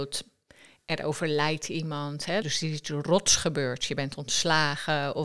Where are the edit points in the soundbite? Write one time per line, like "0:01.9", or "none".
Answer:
0:02.4